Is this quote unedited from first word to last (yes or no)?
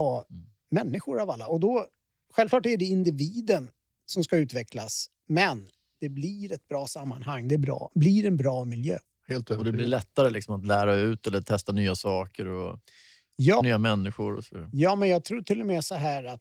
no